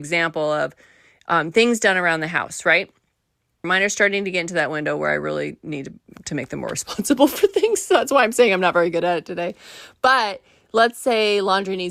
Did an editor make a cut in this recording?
yes; 1 cut; at 3.6 s

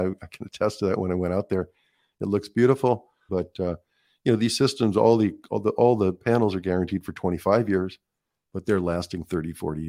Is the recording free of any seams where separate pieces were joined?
no; 1 cut; at 3.3 s

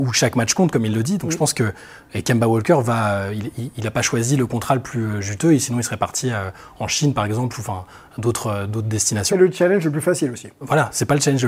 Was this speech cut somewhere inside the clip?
no; 0 cuts

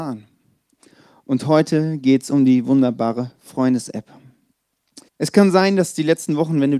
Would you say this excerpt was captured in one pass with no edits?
no; 1 cut; at 5.1 s

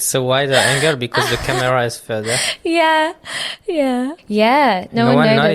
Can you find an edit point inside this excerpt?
yes; 1 cut; at 4.2 s

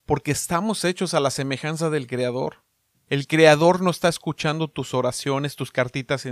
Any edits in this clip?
no; 0 cuts

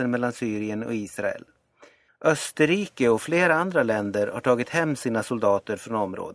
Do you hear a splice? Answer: yes; 1 cut; at 2.1 s

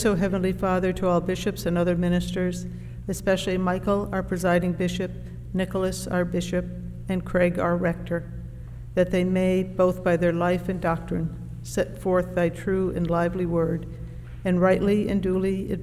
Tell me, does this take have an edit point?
no; 0 cuts

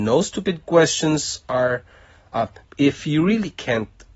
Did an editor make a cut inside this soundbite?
yes; 1 cut; at 2.6 s

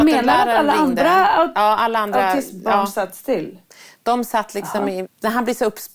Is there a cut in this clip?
yes; 1 cut; at 5.0 s

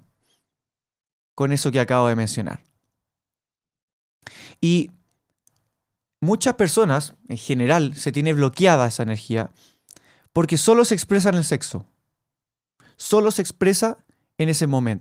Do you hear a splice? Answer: no; 0 cuts

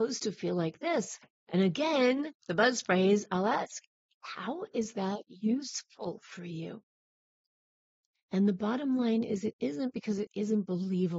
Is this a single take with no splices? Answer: yes; 0 cuts

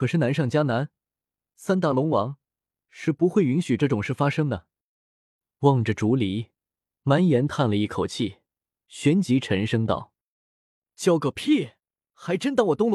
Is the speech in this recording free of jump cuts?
yes; 0 cuts

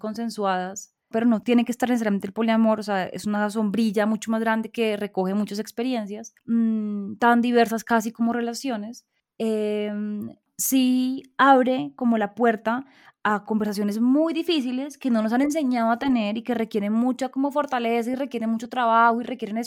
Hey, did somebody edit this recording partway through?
yes; 1 cut; at 1.1 s

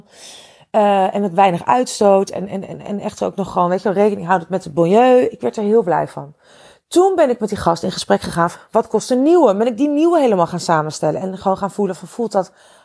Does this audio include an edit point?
yes; 1 cut; at 8.5 s

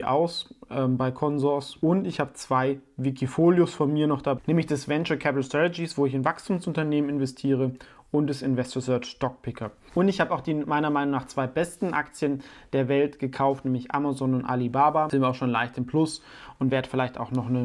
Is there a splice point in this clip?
no; 0 cuts

